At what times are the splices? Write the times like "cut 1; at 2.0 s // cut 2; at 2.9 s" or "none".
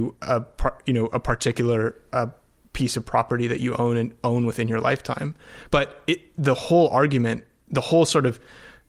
none